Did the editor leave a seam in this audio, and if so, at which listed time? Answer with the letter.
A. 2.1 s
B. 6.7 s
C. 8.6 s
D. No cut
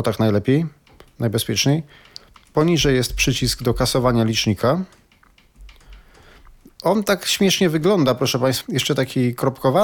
C